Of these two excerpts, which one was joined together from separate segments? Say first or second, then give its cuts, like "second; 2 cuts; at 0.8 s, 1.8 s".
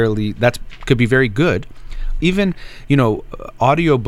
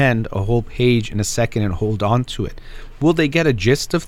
first; 1 cut; at 2.2 s